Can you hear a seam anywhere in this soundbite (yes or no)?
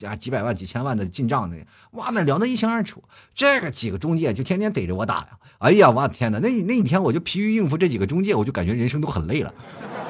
no